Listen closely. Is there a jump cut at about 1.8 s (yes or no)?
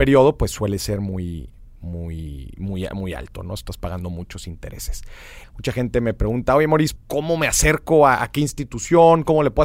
no